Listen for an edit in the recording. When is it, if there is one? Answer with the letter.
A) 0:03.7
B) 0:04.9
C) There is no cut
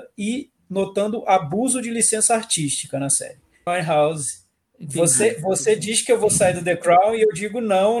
A